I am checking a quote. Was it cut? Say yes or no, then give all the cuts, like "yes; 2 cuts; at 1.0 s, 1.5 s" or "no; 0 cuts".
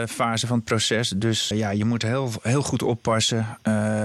yes; 1 cut; at 1.5 s